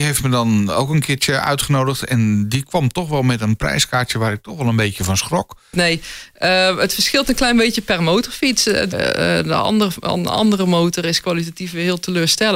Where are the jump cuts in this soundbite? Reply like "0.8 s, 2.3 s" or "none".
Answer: 5.7 s, 8.9 s